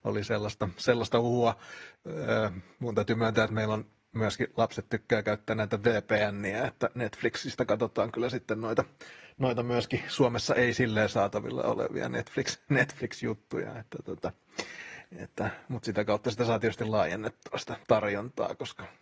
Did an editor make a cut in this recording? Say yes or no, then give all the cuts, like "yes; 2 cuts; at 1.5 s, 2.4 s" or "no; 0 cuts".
no; 0 cuts